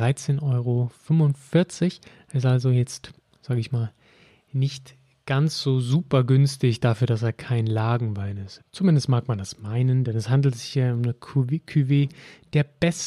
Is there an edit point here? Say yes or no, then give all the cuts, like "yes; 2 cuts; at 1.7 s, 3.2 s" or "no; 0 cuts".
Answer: yes; 1 cut; at 8.6 s